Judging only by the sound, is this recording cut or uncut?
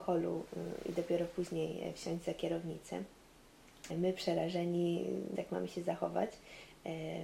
cut